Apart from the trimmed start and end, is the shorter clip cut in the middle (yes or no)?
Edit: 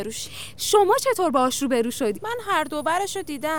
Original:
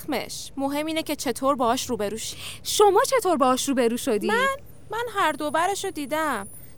yes